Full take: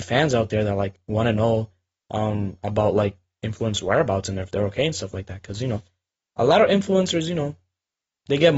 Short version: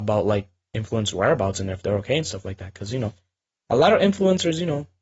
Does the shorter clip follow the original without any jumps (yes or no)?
yes